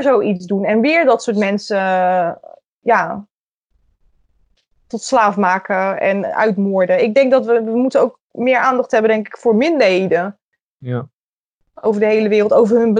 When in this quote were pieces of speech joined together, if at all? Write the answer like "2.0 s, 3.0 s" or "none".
none

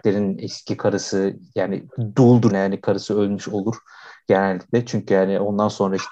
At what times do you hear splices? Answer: 2.5 s

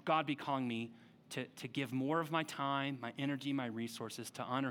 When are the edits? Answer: none

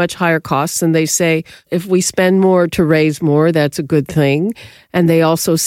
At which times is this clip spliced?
1.7 s

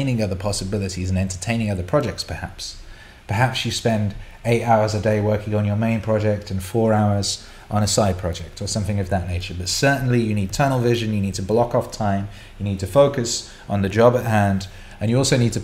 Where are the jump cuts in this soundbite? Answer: none

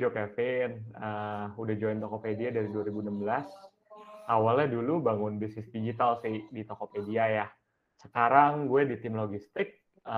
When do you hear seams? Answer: none

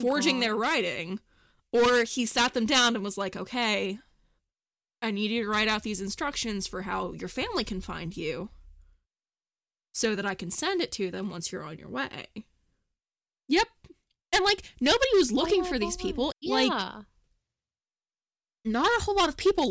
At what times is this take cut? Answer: 13.3 s, 16.3 s

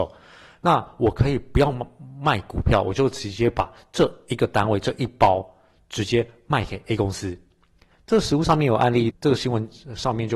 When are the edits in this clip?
9.1 s

